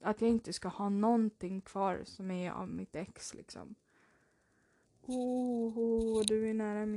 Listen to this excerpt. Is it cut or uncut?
cut